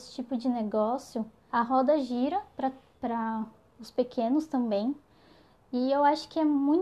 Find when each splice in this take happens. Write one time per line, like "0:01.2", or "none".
0:01.5

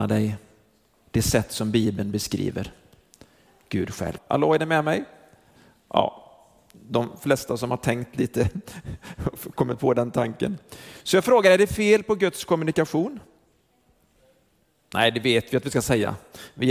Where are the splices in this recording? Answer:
0:04.2

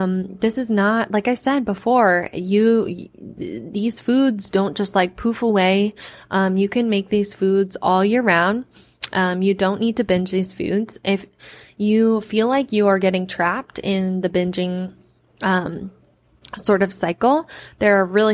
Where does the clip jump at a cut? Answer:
none

